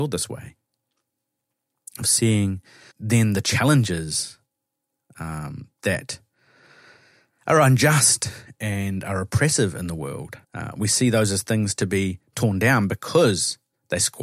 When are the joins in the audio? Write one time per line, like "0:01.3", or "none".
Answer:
0:02.9
0:10.4